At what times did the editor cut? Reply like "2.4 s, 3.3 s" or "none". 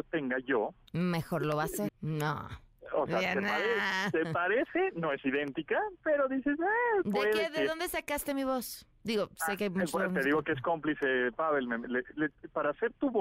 1.9 s